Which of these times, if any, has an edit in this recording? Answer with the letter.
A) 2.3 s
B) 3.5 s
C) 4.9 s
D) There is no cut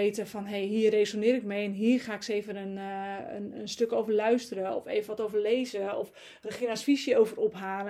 B